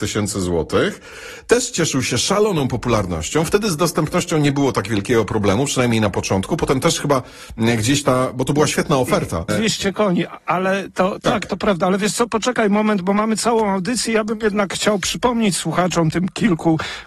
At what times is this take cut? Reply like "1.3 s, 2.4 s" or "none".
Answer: 9.5 s